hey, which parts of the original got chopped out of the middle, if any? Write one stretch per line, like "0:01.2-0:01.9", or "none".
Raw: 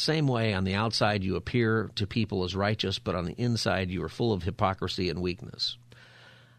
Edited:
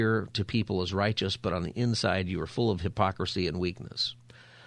none